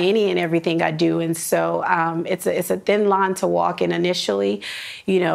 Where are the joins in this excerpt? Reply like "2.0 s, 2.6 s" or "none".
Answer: none